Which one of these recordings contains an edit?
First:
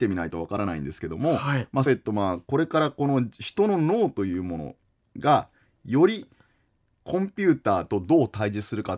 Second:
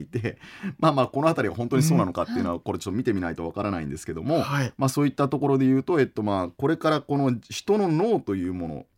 first; 1 cut; at 1.9 s

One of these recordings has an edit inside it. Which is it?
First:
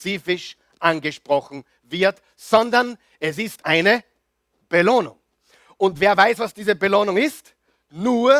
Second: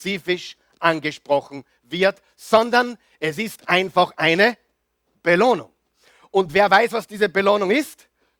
first; 1 cut; at 3.6 s

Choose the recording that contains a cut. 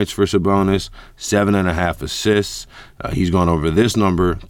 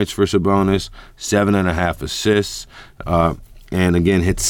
second; 1 cut; at 3.0 s

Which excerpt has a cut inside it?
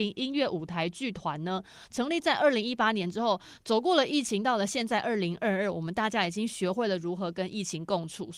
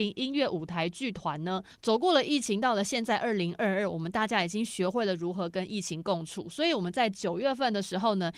second; 1 cut; at 1.7 s

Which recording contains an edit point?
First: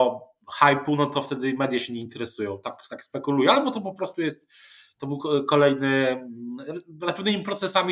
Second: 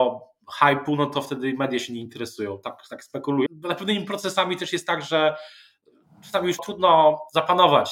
second; 2 cuts; at 3.5 s, 6.6 s

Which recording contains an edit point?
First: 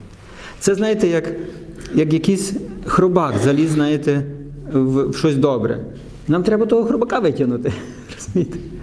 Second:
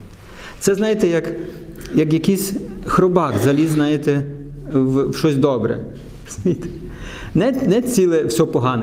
second; 1 cut; at 6.3 s

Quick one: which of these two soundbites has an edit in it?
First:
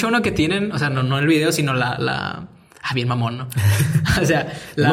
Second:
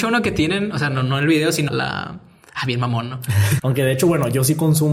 second; 2 cuts; at 1.7 s, 3.6 s

